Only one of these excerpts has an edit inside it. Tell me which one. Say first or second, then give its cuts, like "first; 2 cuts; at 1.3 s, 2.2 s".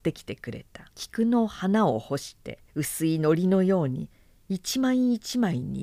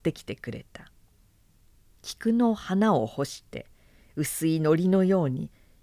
first; 2 cuts; at 0.9 s, 2.7 s